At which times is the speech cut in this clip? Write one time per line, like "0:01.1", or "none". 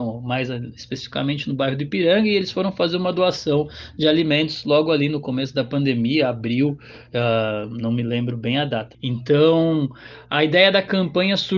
0:08.9